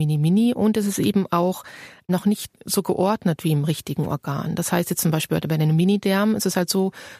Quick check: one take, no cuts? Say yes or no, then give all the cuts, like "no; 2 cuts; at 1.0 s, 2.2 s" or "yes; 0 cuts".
yes; 0 cuts